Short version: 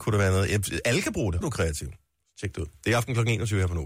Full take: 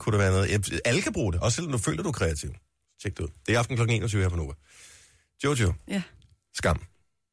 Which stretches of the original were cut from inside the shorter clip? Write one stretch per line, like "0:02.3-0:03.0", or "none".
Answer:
0:01.4-0:02.0

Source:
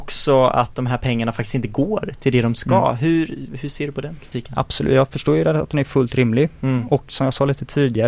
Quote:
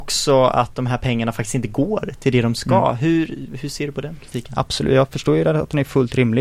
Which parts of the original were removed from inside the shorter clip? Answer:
none

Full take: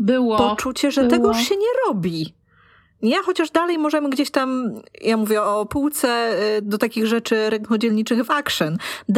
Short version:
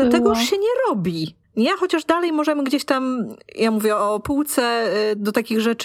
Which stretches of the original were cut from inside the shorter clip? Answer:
0:02.4-0:02.9

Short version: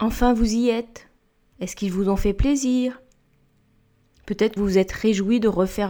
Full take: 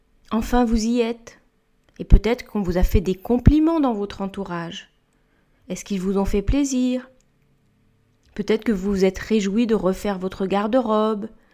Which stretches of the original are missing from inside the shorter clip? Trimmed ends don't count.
0:01.8-0:05.6
0:08.6-0:08.8

